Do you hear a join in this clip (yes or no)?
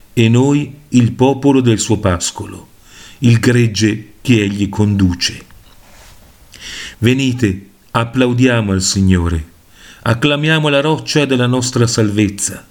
yes